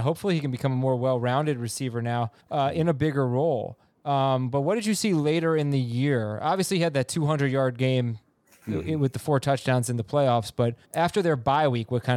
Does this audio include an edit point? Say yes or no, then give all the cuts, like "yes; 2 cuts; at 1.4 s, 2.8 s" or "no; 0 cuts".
yes; 2 cuts; at 2.4 s, 10.8 s